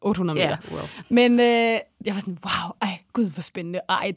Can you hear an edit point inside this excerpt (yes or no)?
yes